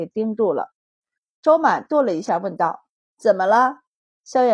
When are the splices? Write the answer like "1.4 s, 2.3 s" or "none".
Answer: none